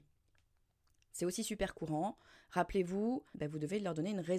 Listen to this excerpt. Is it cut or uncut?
cut